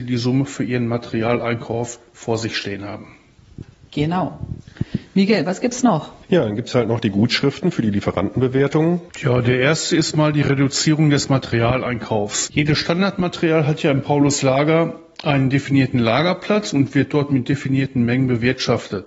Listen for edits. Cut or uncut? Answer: cut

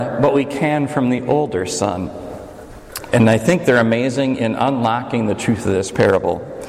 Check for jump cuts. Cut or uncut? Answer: cut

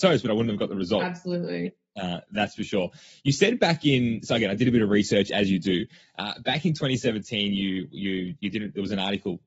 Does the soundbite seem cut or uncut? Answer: uncut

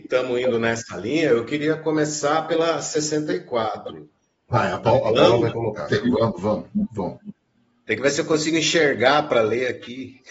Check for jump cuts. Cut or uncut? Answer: cut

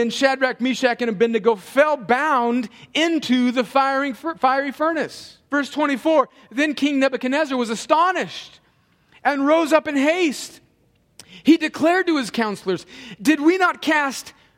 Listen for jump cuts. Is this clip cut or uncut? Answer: cut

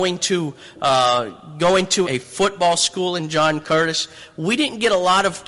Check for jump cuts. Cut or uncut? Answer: cut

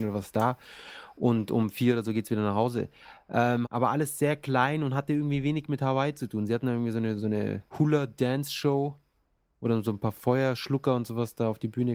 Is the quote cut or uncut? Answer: cut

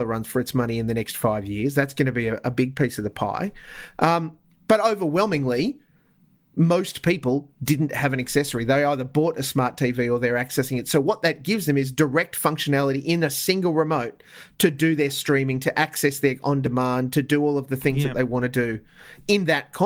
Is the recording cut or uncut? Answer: uncut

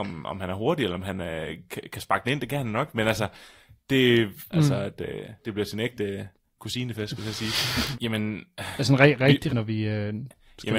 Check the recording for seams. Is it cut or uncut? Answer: cut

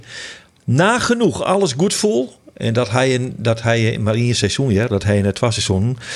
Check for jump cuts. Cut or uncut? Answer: uncut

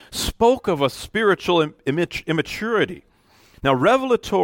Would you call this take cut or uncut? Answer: cut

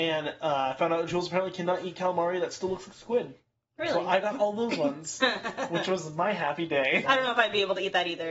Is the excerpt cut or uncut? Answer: cut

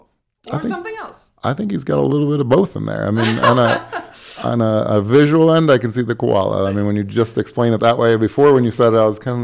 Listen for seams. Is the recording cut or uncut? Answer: uncut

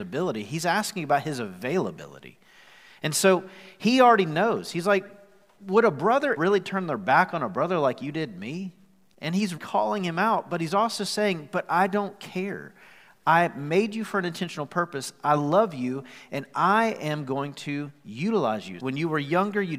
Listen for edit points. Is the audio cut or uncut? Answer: cut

